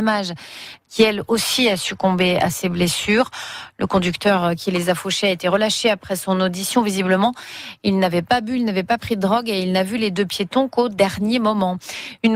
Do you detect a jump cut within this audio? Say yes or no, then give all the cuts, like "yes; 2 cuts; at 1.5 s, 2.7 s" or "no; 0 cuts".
no; 0 cuts